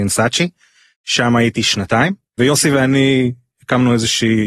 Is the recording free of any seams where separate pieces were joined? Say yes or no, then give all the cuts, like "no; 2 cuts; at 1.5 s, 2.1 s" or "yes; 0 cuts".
no; 1 cut; at 2.4 s